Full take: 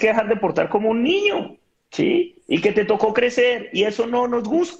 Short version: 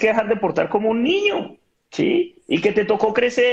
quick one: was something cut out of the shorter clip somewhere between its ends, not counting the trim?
no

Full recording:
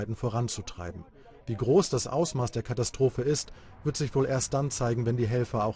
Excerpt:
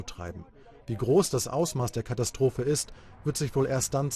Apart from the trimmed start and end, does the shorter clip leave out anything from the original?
no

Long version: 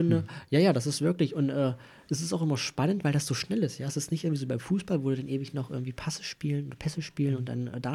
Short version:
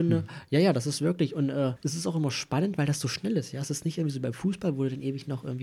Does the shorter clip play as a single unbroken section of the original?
no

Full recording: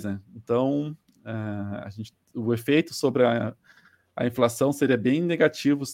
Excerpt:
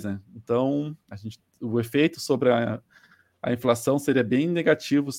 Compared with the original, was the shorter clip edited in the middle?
yes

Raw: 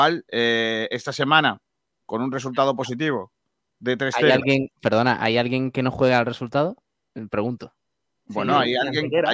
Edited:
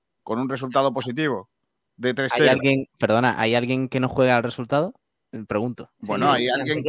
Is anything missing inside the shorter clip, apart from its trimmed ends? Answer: yes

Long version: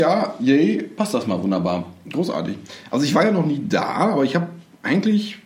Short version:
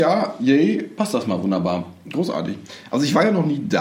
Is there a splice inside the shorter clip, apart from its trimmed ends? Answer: no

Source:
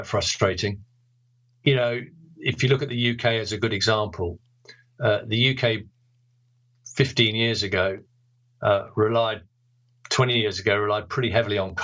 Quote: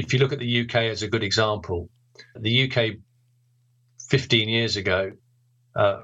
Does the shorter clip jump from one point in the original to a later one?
yes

